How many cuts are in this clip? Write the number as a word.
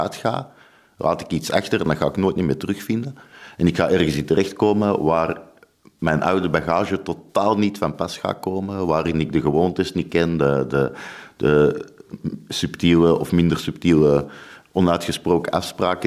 zero